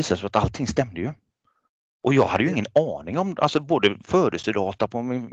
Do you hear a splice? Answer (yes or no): no